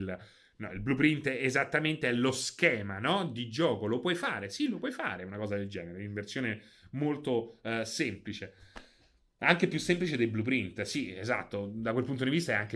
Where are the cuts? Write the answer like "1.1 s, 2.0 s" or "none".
none